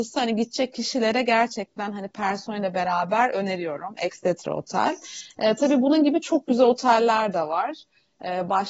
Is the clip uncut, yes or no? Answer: yes